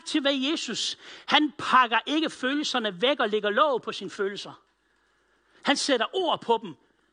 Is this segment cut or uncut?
uncut